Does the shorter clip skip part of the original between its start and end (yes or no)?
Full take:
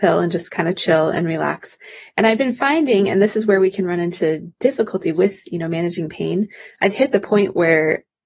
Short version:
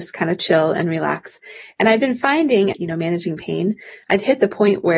yes